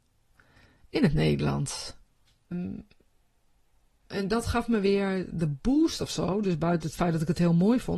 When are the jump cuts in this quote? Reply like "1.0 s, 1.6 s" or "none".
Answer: 2.5 s